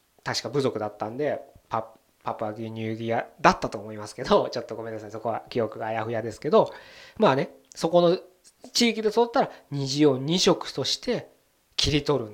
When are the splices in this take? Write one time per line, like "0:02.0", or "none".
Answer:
none